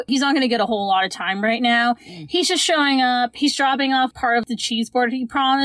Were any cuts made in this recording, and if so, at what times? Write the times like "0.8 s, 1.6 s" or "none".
none